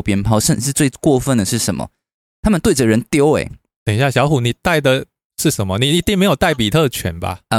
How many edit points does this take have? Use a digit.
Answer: 0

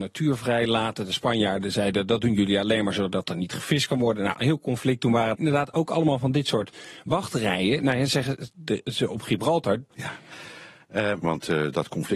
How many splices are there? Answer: 3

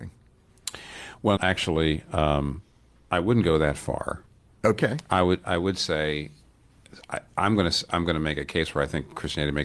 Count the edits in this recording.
1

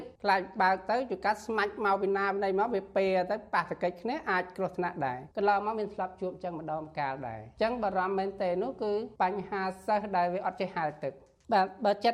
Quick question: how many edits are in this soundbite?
0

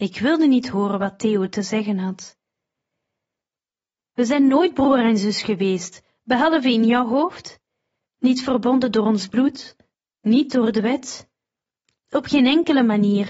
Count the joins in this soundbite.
1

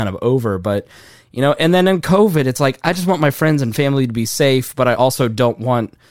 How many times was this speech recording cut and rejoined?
0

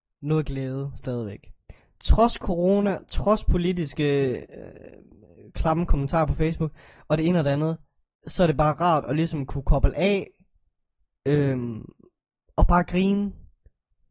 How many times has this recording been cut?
0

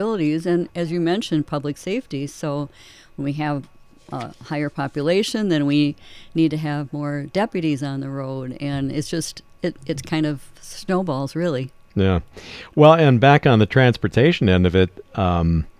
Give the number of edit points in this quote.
0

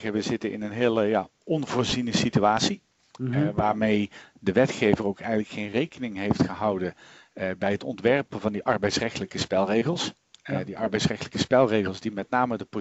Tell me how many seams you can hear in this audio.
0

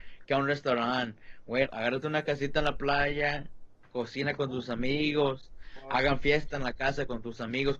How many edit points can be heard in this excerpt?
1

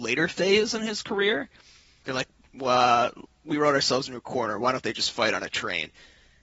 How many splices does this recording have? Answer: 1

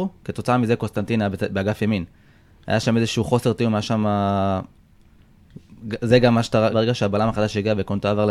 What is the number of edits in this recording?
1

